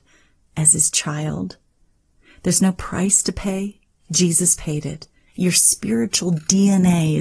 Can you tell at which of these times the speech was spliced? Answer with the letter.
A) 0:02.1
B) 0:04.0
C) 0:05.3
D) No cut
C